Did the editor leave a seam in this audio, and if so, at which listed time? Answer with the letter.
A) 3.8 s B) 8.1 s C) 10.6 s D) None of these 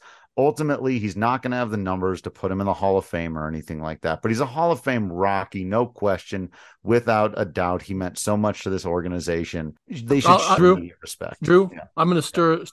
C